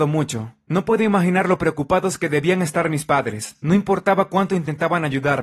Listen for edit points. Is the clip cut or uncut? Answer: uncut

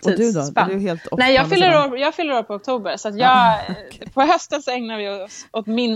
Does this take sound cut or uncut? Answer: uncut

